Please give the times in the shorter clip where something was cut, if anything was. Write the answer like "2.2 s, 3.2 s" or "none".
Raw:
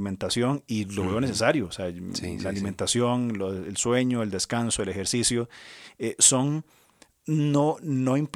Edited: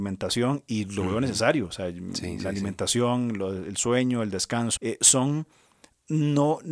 4.8 s